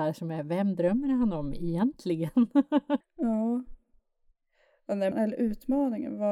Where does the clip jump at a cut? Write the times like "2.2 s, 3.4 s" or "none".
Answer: 3.0 s, 5.1 s